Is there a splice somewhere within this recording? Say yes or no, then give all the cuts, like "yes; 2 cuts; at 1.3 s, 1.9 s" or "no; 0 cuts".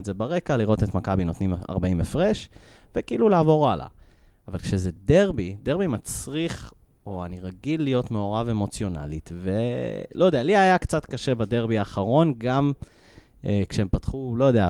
no; 0 cuts